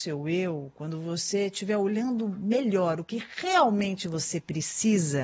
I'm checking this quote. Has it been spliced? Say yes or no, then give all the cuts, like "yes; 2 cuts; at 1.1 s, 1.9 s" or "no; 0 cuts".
no; 0 cuts